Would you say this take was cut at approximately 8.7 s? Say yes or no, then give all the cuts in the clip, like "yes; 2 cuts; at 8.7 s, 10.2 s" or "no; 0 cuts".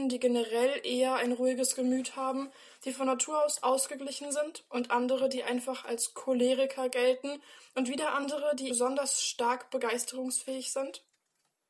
yes; 1 cut; at 8.7 s